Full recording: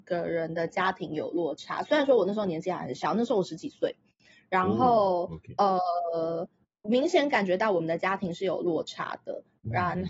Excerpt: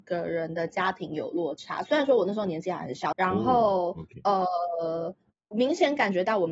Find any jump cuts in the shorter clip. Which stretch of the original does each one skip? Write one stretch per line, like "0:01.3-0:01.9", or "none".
0:03.1-0:04.5

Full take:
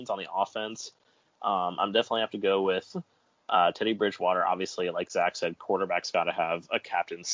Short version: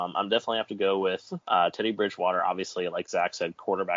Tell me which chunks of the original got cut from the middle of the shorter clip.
0:03.1-0:03.4

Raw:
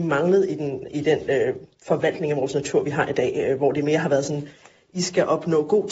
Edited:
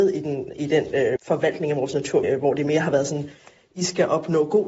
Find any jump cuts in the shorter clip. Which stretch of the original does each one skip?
0:01.5-0:01.8
0:02.8-0:03.4

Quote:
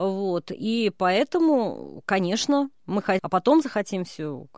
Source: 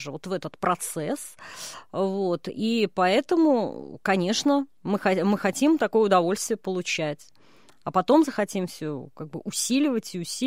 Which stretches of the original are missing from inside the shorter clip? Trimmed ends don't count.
0:05.2-0:07.8

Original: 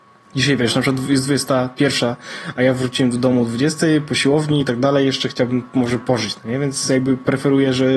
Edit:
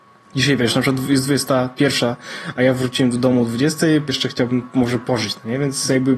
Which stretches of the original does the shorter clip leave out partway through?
0:04.1-0:05.1

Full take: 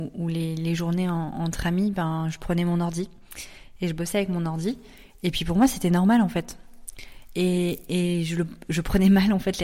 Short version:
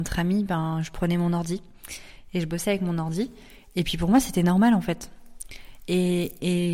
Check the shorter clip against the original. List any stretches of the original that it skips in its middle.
none

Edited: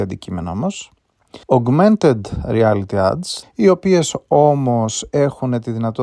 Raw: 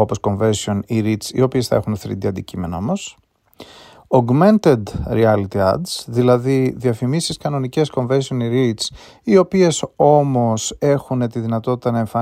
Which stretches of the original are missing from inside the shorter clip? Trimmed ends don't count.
0:03.7-0:04.1
0:06.0-0:09.1

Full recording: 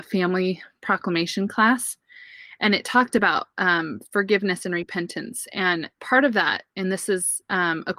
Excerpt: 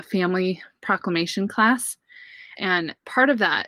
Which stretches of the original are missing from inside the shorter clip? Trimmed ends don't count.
0:02.5-0:05.5

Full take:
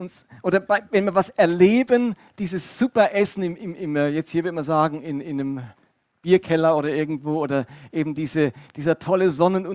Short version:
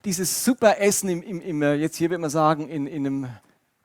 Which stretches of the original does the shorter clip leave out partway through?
none

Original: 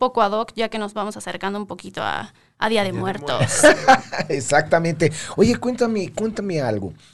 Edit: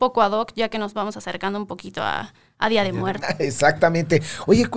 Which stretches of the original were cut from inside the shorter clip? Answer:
0:03.2-0:04.1

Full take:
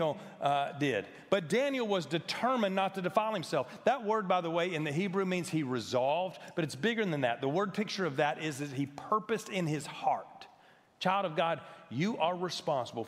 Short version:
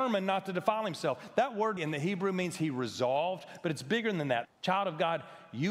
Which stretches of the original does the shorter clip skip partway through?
0:04.3-0:04.7
0:07.4-0:10.8

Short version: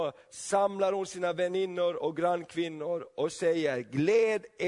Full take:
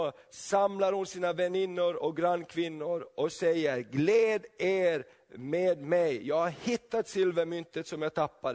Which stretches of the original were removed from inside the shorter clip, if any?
none

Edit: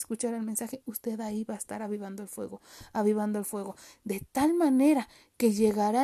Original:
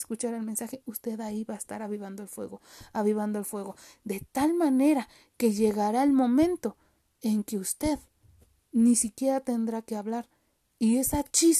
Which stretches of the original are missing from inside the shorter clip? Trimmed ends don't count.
none

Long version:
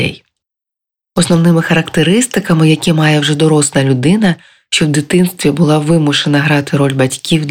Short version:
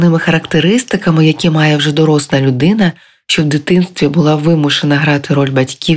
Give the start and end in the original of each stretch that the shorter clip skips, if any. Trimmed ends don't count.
none

